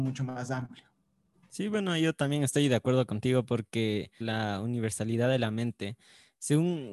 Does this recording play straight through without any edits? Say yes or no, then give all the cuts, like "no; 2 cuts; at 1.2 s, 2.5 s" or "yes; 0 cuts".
no; 2 cuts; at 1.3 s, 4.2 s